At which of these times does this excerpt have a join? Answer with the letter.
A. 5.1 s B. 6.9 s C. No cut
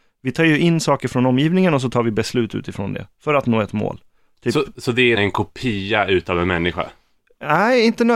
A